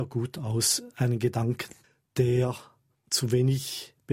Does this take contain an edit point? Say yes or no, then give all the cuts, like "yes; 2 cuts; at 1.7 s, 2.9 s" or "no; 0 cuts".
no; 0 cuts